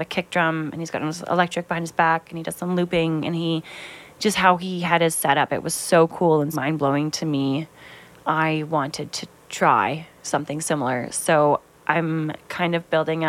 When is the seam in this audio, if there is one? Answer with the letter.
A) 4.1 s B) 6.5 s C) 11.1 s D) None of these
B